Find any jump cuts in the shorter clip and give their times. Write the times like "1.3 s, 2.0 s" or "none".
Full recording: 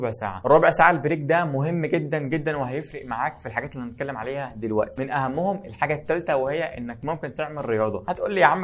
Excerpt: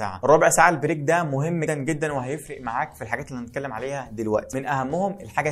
1.7 s